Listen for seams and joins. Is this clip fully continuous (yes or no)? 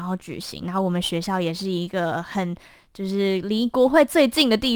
yes